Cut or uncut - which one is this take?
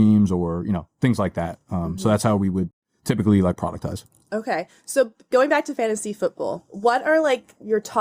uncut